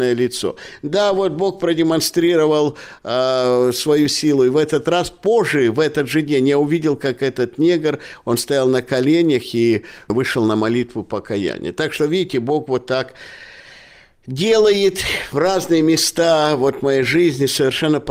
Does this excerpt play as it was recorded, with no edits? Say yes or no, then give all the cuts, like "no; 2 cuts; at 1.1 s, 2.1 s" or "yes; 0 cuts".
yes; 0 cuts